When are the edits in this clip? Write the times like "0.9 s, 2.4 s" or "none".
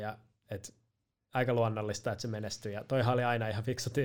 none